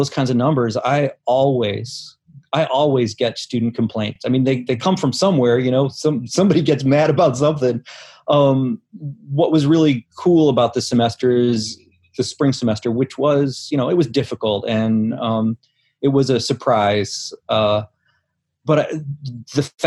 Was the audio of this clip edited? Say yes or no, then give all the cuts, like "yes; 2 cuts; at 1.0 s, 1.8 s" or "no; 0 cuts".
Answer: no; 0 cuts